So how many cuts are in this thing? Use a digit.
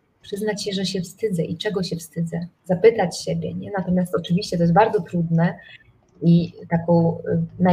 1